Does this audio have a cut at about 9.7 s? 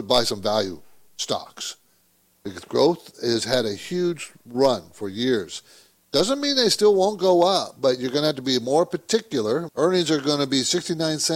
yes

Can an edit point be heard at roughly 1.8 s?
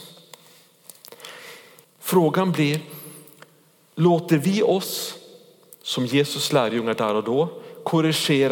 yes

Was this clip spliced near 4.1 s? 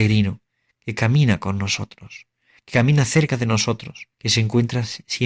yes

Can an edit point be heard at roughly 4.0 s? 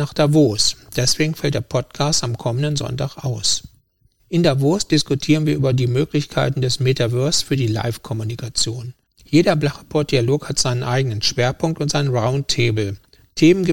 no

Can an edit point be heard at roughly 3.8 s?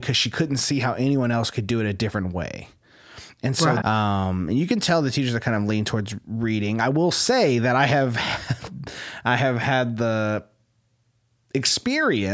yes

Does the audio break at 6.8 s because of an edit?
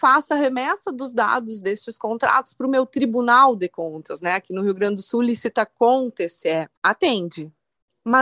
yes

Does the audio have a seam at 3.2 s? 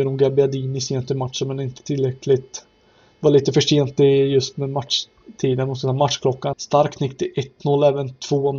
no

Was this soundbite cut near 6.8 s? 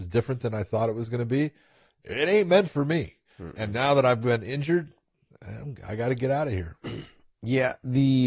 yes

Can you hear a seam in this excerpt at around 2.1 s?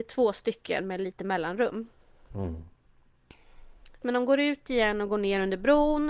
no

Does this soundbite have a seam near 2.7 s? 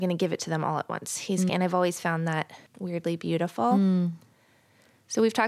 yes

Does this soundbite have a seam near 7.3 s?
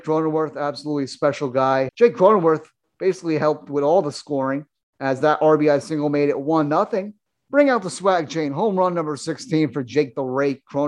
yes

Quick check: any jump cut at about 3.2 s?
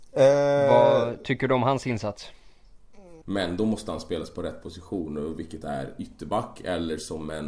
yes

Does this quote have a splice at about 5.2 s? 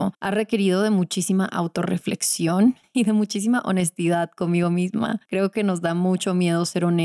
no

